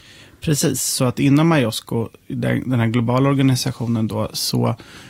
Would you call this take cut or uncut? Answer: uncut